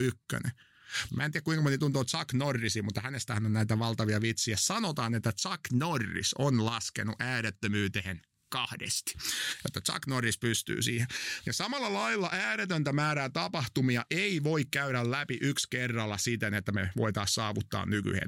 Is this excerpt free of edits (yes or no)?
no